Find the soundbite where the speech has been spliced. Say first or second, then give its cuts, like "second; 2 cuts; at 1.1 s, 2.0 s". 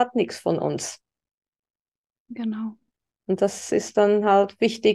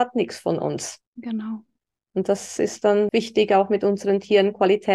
second; 2 cuts; at 1.1 s, 3.1 s